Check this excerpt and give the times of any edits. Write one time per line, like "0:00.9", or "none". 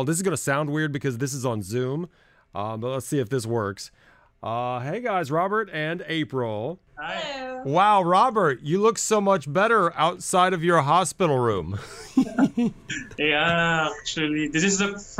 none